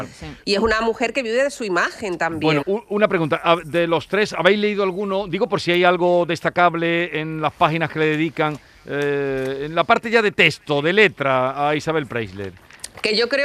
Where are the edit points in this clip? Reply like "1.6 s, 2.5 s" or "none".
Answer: 2.6 s